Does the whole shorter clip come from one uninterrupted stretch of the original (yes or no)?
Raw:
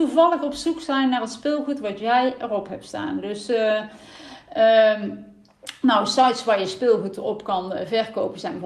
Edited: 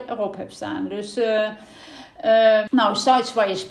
no